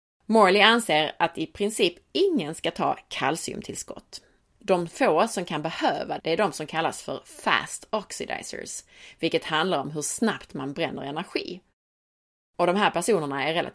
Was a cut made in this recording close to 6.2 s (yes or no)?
yes